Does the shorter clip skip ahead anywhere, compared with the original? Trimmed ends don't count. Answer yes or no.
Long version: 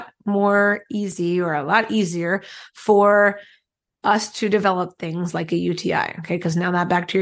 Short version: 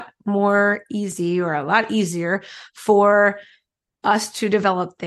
no